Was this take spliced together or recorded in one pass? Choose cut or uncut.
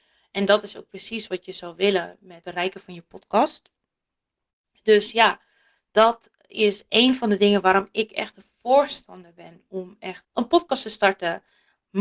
uncut